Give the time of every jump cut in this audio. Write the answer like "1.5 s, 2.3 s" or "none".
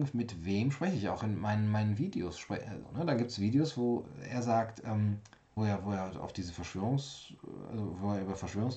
2.8 s, 5.6 s